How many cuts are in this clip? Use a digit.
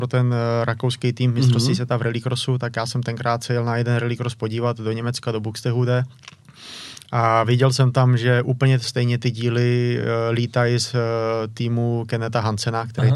0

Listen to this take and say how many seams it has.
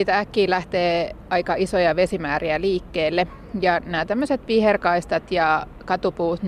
0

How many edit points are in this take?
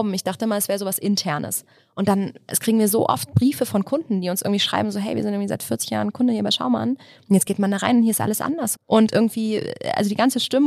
1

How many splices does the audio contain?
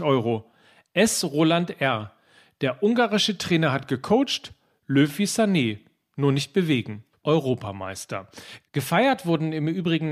1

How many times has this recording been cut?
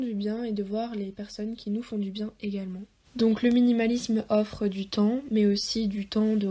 1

